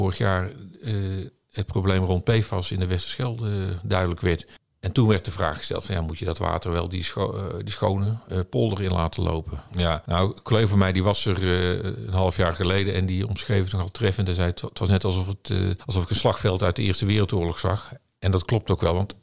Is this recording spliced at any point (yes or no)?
yes